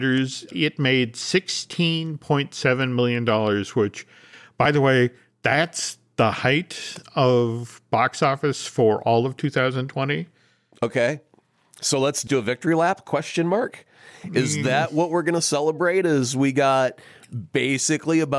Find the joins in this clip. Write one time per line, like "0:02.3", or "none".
none